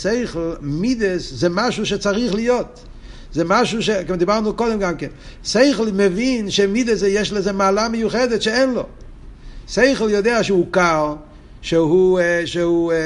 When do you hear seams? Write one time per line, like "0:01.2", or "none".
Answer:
none